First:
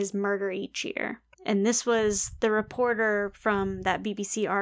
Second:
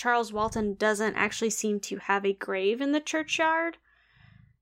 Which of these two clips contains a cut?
first; 1 cut; at 1.3 s

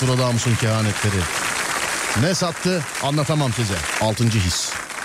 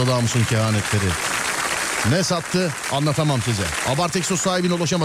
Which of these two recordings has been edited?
first; 1 cut; at 3.9 s

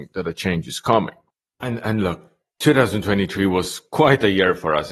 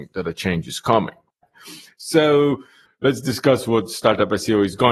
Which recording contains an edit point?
second; 2 cuts; at 1.4 s, 2.9 s

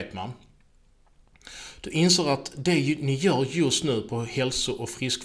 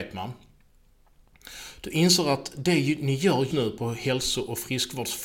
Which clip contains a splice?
second; 1 cut; at 3.5 s

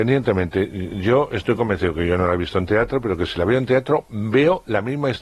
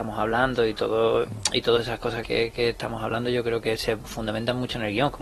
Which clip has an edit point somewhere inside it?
second; 1 cut; at 2.2 s

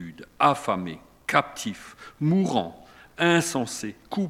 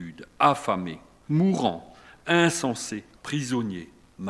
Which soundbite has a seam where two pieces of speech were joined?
second; 2 cuts; at 1.2 s, 3.2 s

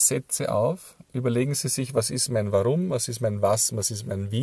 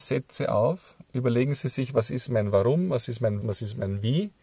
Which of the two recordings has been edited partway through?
second; 1 cut; at 3.4 s

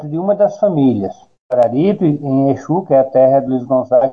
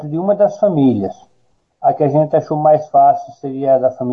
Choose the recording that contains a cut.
first; 1 cut; at 1.3 s

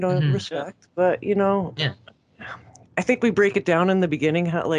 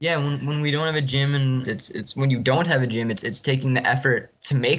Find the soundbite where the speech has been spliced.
second; 1 cut; at 1.7 s

